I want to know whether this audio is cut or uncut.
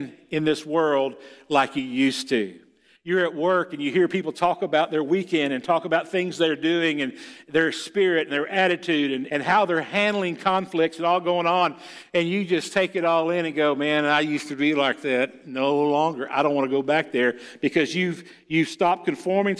cut